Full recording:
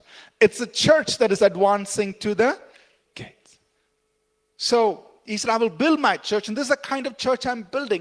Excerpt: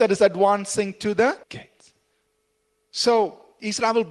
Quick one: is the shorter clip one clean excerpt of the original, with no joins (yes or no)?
no